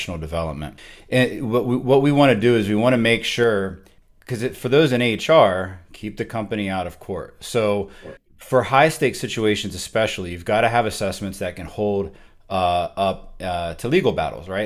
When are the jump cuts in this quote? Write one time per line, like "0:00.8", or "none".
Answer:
none